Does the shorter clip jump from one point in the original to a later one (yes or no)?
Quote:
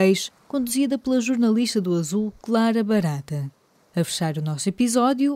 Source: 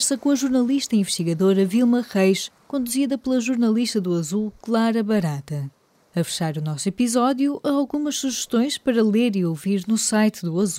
no